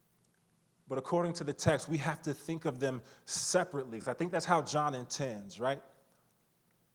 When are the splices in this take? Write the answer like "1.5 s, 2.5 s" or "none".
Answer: none